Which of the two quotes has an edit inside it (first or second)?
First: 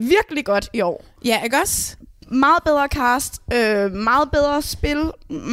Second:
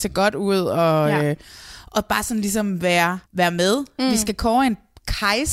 second